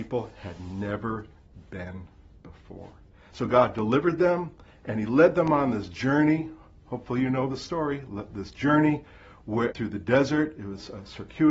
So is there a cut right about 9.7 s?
yes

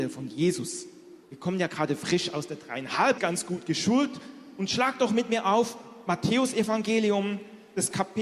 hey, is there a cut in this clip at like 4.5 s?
no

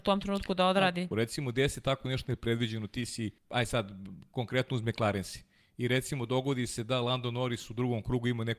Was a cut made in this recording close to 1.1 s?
yes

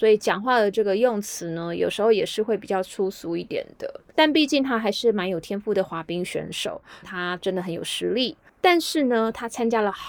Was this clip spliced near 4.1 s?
yes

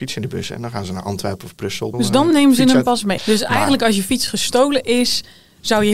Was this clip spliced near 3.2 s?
yes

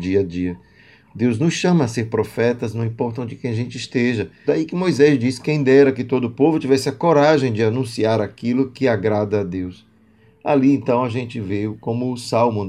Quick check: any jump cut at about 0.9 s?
no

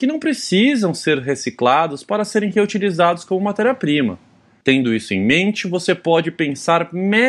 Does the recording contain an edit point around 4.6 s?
yes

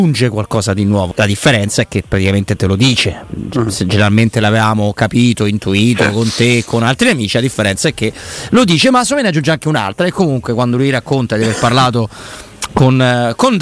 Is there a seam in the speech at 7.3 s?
no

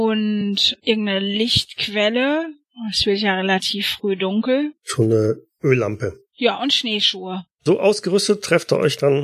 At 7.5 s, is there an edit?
yes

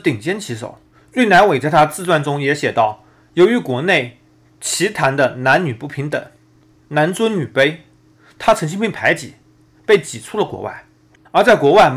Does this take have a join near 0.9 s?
yes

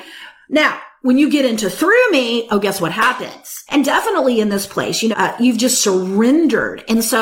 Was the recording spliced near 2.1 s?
no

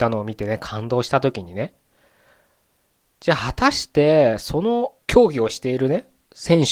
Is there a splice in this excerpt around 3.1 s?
no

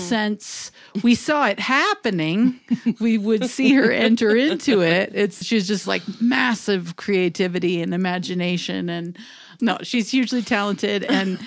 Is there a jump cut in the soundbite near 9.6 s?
yes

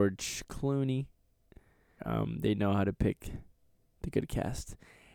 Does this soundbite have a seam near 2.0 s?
yes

